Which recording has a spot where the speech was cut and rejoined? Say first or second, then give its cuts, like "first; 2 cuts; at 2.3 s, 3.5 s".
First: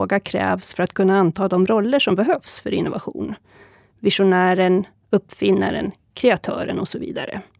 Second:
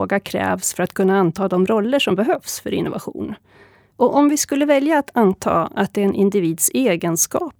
second; 1 cut; at 3.9 s